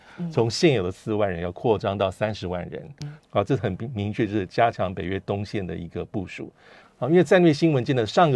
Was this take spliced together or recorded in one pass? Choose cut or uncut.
cut